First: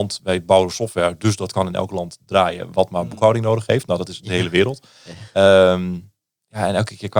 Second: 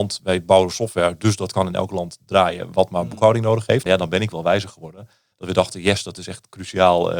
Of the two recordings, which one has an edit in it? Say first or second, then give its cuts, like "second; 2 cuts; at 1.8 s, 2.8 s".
second; 2 cuts; at 3.9 s, 5.3 s